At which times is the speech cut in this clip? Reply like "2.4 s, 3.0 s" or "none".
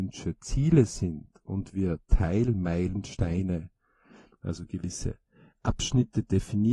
none